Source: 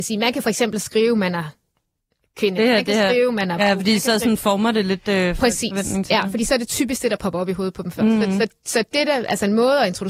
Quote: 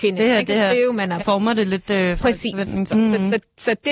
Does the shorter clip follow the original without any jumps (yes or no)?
no